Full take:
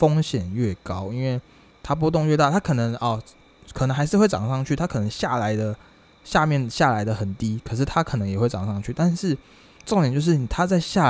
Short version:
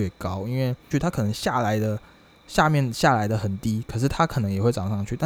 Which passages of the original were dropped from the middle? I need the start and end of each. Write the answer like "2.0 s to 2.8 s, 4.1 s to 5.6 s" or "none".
1.6 s to 4.7 s